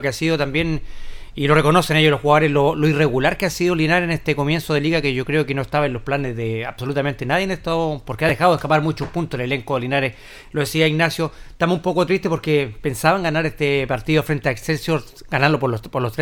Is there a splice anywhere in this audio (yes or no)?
no